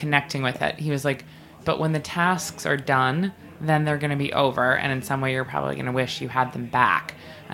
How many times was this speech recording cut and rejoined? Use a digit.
1